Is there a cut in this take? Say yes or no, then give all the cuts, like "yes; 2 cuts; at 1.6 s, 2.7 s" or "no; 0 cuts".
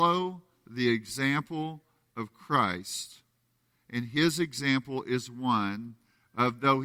no; 0 cuts